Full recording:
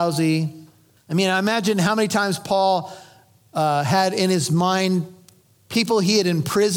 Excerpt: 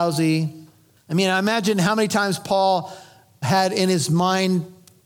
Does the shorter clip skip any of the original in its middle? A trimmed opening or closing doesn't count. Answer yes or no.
yes